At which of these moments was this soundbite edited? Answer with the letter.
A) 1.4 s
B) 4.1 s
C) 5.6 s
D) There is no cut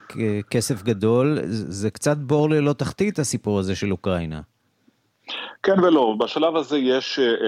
D